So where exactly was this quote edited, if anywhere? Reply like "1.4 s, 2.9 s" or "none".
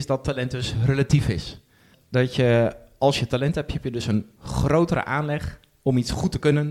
none